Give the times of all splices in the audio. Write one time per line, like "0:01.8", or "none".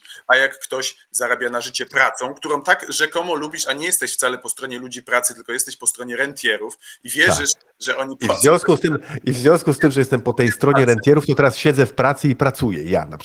none